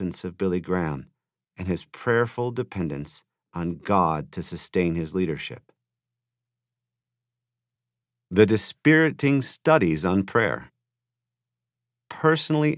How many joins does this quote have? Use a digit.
0